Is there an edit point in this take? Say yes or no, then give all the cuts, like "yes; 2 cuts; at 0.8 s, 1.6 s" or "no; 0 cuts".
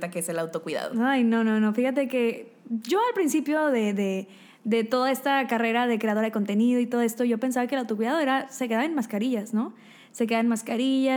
no; 0 cuts